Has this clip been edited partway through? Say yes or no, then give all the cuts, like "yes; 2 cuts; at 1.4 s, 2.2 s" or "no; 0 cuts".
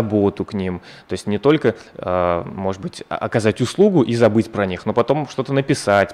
no; 0 cuts